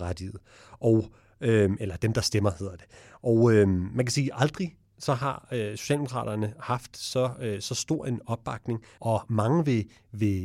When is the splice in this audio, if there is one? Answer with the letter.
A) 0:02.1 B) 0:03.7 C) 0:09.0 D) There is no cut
C